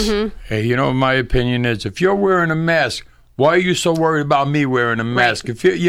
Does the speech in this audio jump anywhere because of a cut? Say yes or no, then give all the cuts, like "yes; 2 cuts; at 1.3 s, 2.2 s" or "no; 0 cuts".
no; 0 cuts